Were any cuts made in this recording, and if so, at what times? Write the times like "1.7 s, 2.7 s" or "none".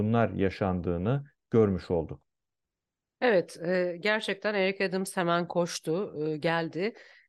none